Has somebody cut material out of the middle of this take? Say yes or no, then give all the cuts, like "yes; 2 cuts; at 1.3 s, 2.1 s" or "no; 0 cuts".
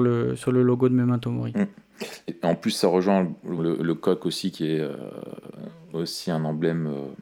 yes; 2 cuts; at 2.3 s, 3.6 s